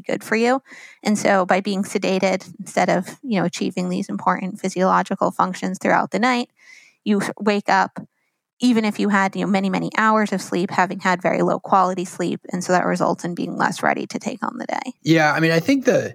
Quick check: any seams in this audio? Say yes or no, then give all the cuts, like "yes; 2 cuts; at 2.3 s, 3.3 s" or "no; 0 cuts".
yes; 1 cut; at 15.0 s